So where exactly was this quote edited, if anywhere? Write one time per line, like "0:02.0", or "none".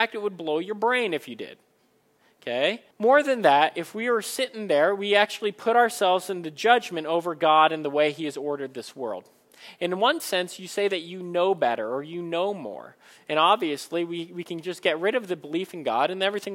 0:02.9